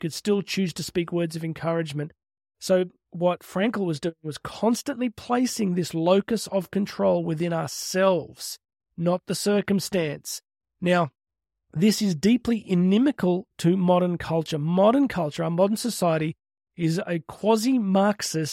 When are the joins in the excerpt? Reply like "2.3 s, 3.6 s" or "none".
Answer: none

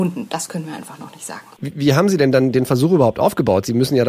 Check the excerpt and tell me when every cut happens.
1.6 s

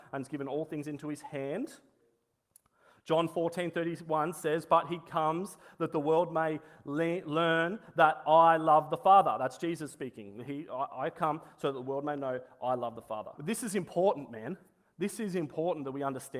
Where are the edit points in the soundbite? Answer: 13.3 s

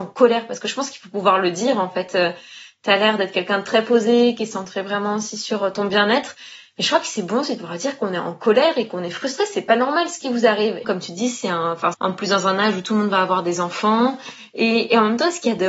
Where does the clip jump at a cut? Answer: 10.8 s, 11.9 s

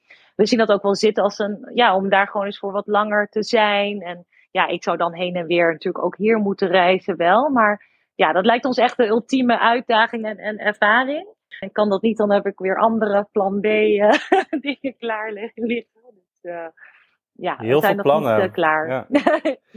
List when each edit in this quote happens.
11.6 s

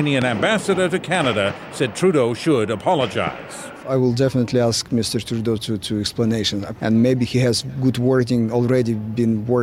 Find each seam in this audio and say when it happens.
5.6 s, 6.8 s

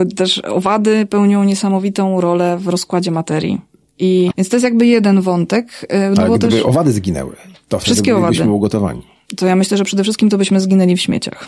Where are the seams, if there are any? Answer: 4.3 s

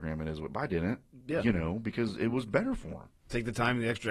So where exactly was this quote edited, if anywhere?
none

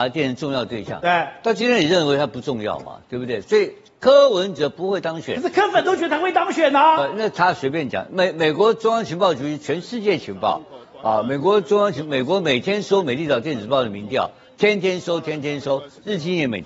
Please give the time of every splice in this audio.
none

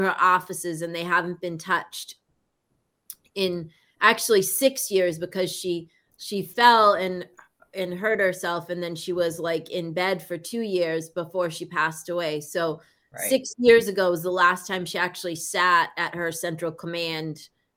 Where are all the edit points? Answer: none

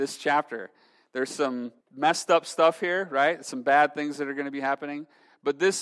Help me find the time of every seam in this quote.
1.8 s

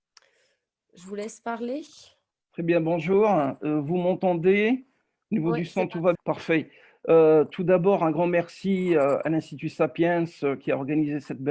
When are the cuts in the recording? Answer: 6.1 s

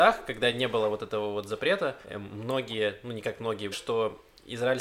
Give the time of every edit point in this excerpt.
2.0 s, 3.7 s

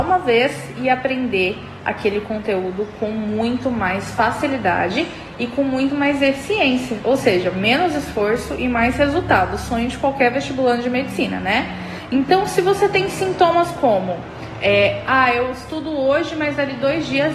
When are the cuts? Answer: none

